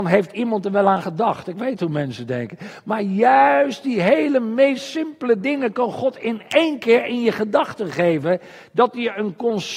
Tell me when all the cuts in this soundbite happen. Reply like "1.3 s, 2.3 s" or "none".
none